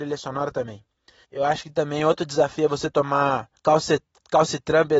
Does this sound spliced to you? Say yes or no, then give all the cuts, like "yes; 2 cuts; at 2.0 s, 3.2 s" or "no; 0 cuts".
yes; 2 cuts; at 1.2 s, 3.6 s